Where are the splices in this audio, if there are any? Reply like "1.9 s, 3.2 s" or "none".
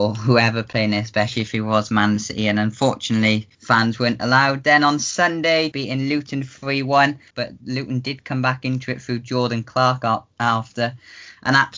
3.5 s, 5.7 s, 7.3 s